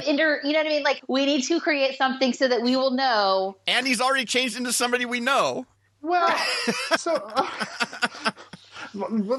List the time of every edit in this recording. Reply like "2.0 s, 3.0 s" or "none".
1.0 s, 7.0 s